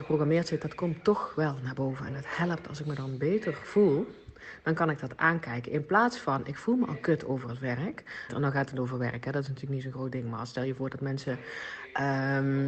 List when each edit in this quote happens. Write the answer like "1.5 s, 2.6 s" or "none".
8.3 s